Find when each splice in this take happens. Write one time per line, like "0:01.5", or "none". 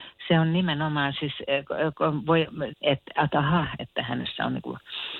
0:02.7
0:03.8